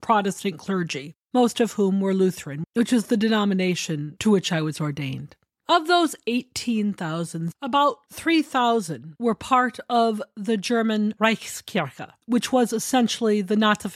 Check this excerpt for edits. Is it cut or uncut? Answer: uncut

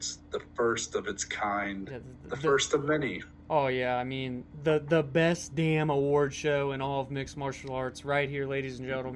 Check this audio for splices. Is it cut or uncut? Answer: uncut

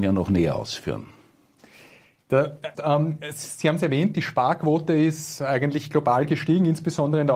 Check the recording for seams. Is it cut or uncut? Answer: cut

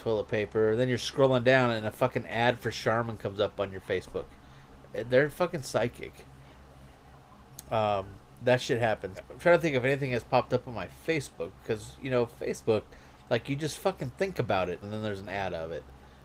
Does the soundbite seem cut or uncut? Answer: cut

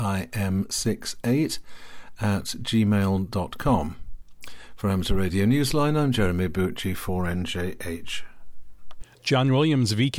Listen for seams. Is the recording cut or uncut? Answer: cut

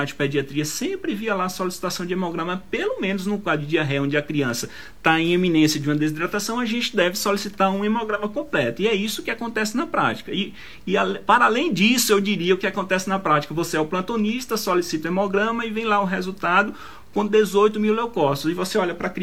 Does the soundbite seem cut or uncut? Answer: uncut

